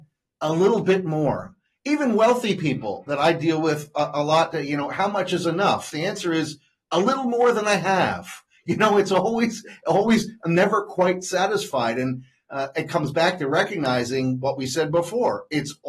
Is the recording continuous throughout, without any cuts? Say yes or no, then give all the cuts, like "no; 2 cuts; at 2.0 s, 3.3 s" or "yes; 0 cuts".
yes; 0 cuts